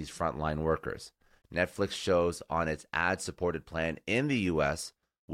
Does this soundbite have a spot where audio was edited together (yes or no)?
yes